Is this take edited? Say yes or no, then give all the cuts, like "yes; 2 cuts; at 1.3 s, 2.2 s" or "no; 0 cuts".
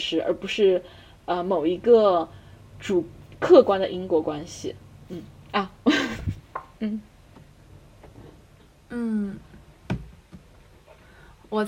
no; 0 cuts